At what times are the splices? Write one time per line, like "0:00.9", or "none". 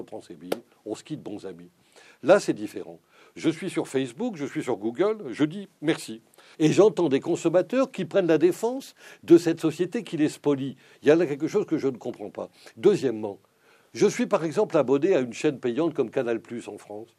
0:06.5